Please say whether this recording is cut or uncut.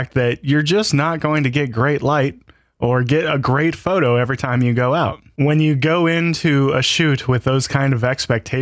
uncut